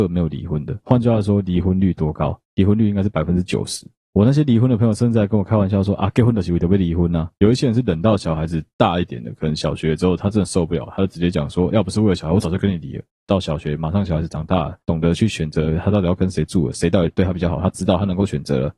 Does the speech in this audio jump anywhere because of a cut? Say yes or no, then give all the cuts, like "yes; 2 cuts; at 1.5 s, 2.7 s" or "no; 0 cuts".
no; 0 cuts